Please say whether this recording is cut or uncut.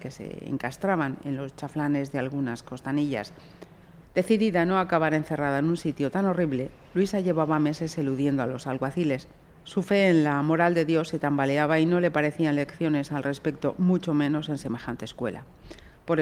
cut